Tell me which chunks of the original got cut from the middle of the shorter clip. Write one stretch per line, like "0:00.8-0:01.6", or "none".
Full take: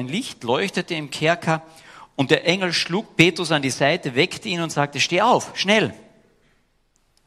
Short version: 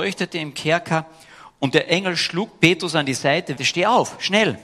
0:04.1-0:04.9